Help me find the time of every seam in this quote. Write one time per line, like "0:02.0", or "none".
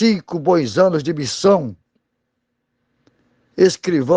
none